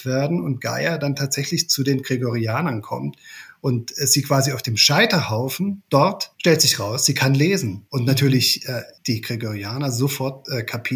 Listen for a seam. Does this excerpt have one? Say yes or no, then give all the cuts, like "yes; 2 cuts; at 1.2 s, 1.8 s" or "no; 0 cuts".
no; 0 cuts